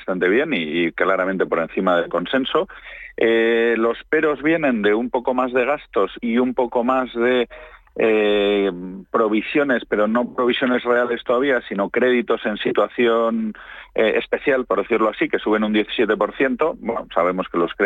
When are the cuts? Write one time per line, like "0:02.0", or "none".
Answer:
none